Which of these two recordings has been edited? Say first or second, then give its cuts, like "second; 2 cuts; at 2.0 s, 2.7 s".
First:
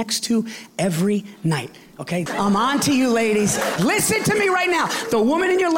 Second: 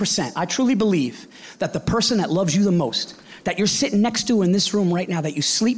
first; 2 cuts; at 2.3 s, 3.8 s